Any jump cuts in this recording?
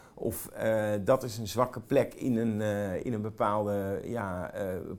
no; 0 cuts

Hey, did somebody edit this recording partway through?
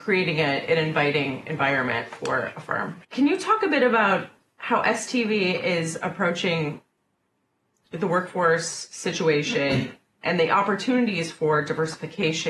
yes; 2 cuts; at 3.0 s, 10.2 s

